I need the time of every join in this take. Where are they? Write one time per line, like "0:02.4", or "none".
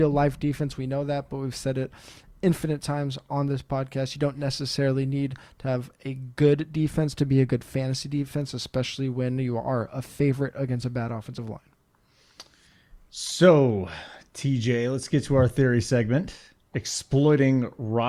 none